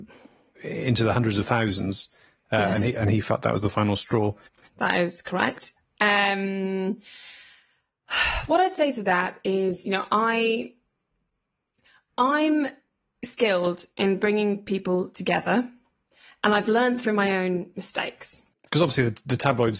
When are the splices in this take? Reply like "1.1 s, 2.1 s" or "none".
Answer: 4.6 s